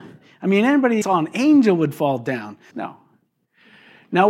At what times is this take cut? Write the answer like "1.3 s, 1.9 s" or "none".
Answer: 1.0 s, 2.7 s